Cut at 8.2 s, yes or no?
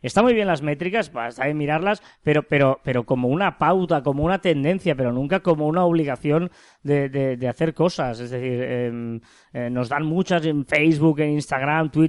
no